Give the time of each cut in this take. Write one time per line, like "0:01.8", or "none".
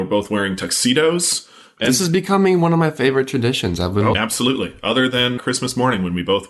0:04.1
0:05.4